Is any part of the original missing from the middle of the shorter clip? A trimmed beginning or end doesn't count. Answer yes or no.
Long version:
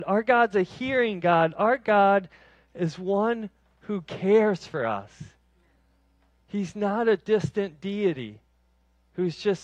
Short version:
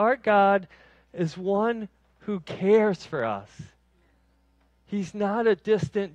no